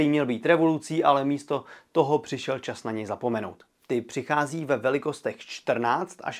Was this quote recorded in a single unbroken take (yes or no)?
no